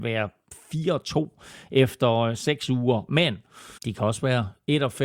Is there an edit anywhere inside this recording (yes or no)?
yes